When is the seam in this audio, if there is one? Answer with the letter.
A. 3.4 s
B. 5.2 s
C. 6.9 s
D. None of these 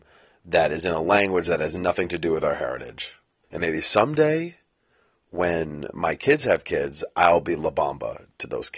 A